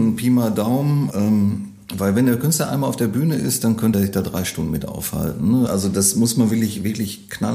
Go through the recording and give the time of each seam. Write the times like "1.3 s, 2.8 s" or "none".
1.1 s, 3.9 s, 5.7 s